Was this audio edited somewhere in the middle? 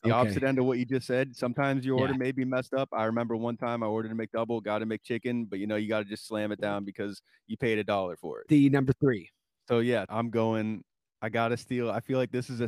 yes; 2 cuts; at 8.5 s, 10.1 s

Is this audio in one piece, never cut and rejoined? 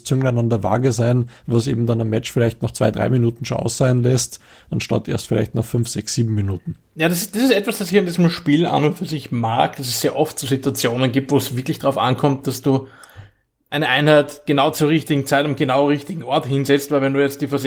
yes; 0 cuts

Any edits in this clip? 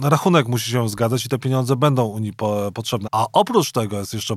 yes; 1 cut; at 3.0 s

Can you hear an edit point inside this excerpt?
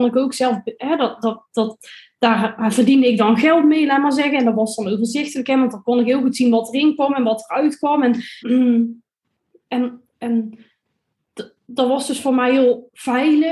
yes; 1 cut; at 8.4 s

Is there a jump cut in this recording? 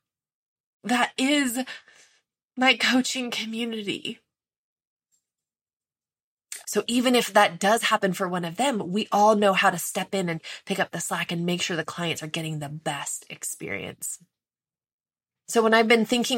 yes; 1 cut; at 6.6 s

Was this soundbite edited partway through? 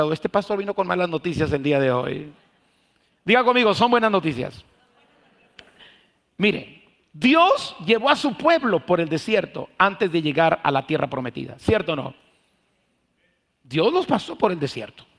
no; 0 cuts

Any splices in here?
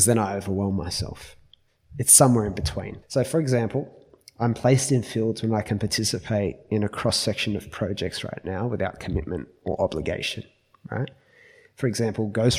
yes; 1 cut; at 3.0 s

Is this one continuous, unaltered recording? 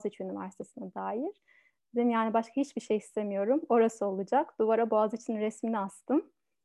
yes; 0 cuts

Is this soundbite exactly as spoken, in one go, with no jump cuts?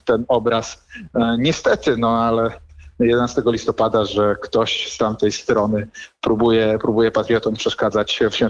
yes; 0 cuts

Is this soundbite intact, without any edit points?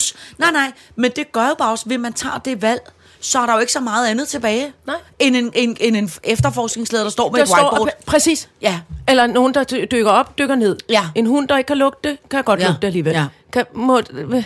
yes; 0 cuts

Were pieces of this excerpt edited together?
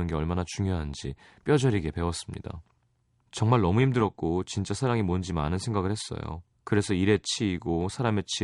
yes; 2 cuts; at 3.2 s, 6.5 s

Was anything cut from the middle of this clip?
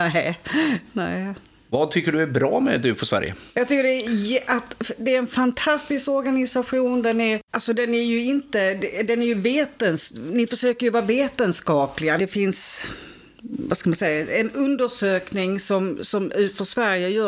yes; 2 cuts; at 7.5 s, 12.2 s

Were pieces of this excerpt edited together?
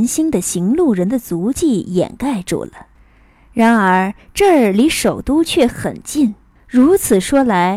yes; 1 cut; at 6.6 s

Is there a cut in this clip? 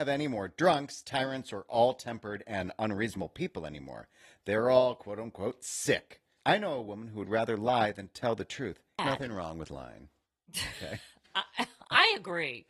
yes; 2 cuts; at 6.4 s, 9.0 s

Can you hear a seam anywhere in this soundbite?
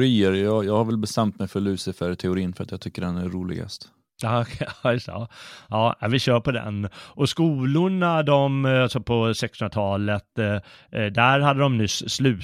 no; 0 cuts

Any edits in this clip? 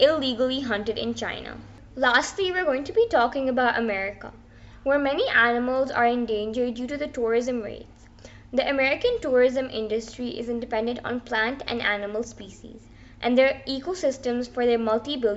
no; 0 cuts

